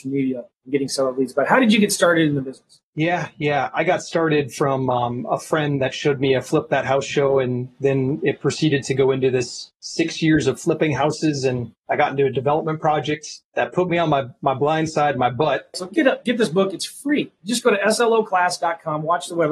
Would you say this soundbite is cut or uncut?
cut